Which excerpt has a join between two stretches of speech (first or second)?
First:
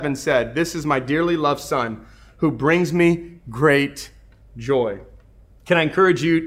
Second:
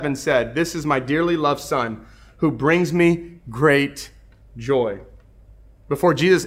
first